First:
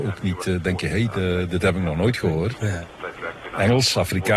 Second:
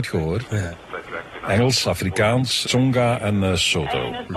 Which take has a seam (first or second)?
second